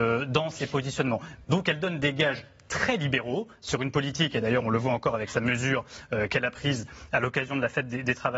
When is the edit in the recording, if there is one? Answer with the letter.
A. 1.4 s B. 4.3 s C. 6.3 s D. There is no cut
A